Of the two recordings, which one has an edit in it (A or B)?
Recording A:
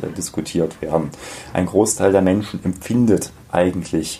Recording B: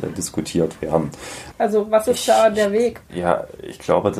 B